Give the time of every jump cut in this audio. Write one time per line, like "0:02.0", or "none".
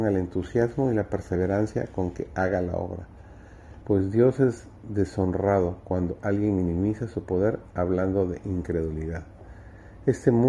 0:03.8